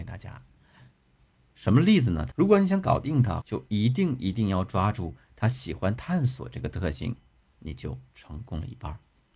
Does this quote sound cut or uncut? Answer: cut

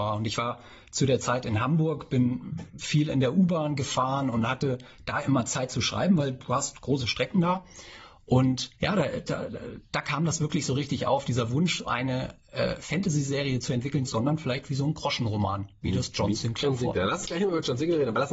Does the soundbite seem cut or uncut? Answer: cut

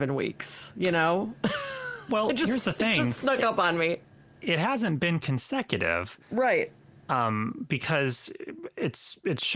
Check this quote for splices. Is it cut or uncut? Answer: uncut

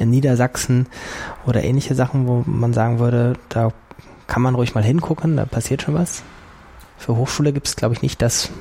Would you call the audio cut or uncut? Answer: cut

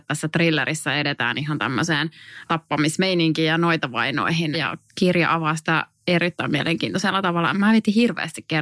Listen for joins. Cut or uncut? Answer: cut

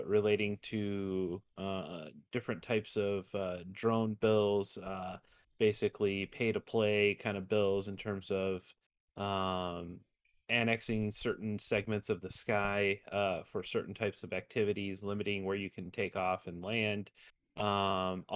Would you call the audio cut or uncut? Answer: uncut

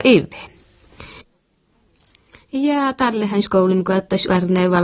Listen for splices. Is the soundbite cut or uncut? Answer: uncut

